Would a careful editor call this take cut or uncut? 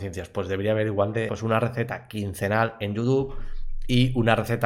cut